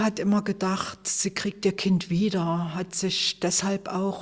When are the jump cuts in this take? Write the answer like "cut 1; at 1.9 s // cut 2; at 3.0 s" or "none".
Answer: none